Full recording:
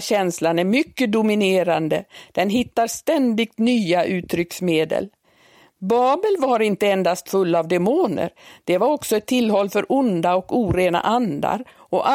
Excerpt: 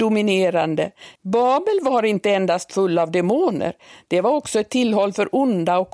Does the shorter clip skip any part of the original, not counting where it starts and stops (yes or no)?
yes